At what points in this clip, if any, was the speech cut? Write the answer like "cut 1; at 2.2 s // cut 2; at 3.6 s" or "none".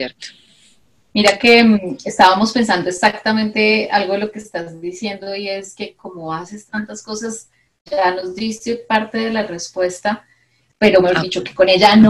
cut 1; at 7.8 s // cut 2; at 10.7 s

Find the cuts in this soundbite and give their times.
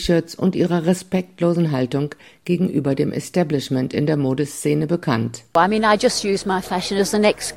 none

